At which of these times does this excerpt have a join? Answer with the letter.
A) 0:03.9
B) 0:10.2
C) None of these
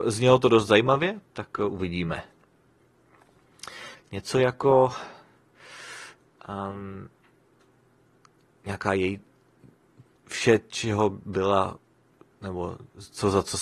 A